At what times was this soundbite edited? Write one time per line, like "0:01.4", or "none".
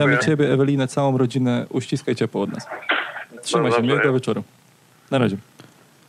0:03.4